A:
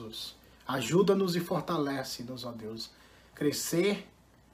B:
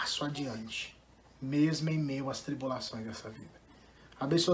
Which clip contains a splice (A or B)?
A